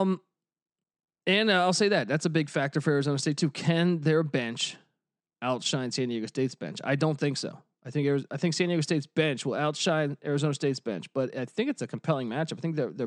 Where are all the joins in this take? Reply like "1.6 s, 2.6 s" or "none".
none